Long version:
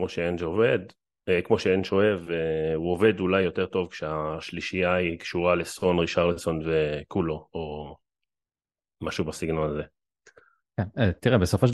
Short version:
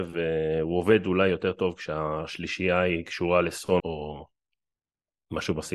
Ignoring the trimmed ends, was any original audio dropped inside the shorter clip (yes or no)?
yes